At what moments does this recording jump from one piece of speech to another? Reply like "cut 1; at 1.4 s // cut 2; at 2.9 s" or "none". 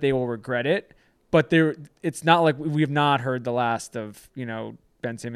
none